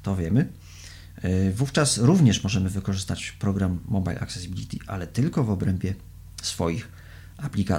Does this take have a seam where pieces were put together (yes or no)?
no